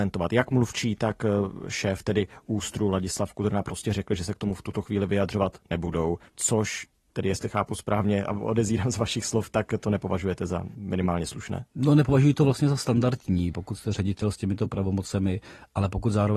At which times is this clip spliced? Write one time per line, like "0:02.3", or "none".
0:06.3
0:13.5